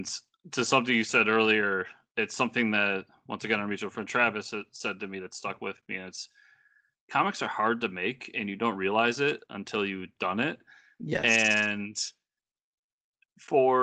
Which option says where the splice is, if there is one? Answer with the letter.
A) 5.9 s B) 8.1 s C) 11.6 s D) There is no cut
D